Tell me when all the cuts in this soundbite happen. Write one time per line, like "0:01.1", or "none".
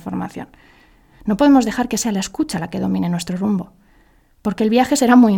none